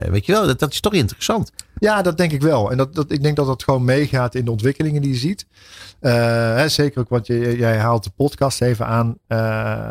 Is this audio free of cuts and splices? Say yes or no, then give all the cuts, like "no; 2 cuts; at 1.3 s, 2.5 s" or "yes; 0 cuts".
yes; 0 cuts